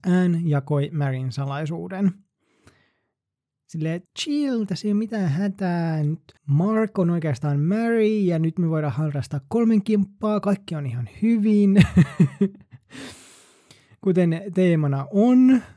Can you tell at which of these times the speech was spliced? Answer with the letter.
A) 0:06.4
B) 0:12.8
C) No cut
A